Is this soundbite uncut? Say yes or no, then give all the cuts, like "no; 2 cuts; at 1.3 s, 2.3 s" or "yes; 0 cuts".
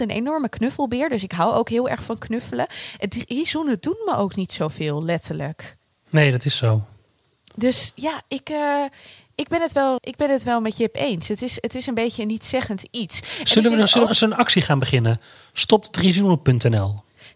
no; 2 cuts; at 10.0 s, 14.1 s